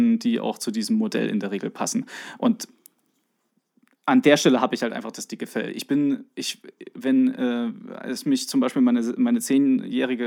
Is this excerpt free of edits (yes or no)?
yes